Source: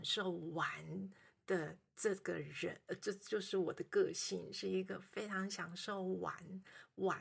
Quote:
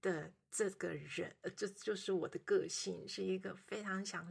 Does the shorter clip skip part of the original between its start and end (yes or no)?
no